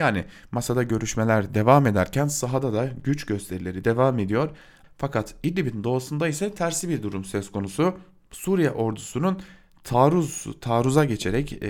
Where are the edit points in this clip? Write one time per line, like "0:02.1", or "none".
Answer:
0:04.8